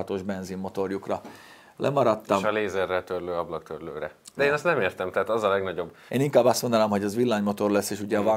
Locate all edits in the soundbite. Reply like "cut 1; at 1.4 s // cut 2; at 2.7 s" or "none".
cut 1; at 4.4 s // cut 2; at 6.1 s